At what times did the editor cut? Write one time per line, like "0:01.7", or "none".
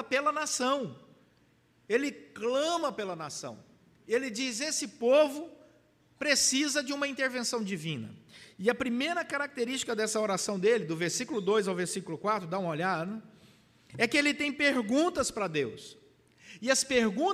none